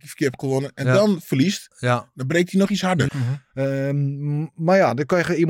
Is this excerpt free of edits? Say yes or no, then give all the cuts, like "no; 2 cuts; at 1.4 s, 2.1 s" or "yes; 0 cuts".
no; 1 cut; at 3.1 s